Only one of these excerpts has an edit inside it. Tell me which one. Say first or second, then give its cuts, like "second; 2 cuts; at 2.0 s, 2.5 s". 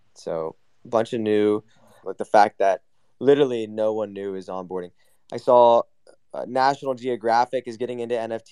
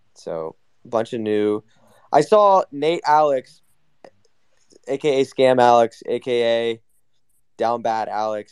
first; 1 cut; at 2.0 s